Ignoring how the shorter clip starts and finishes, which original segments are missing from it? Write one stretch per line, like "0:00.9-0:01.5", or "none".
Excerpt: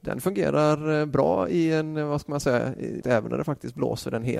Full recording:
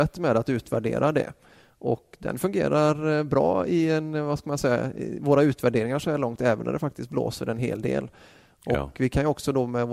0:05.2-0:06.4